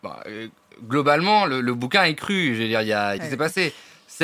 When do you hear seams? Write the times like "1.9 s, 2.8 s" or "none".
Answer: 3.2 s